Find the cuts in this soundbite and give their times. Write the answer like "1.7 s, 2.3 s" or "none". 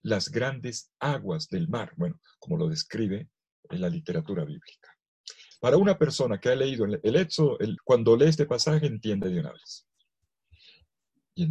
5.5 s, 7.8 s